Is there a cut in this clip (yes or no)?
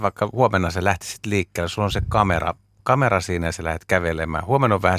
no